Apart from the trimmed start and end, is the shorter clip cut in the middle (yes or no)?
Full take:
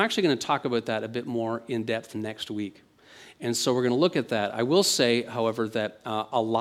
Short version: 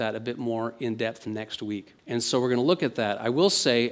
yes